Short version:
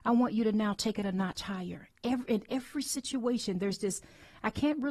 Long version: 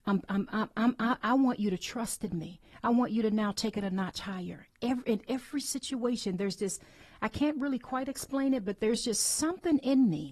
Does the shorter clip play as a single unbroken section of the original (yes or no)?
yes